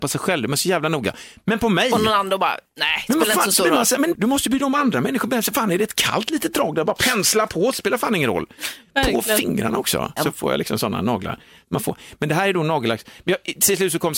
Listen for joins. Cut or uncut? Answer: cut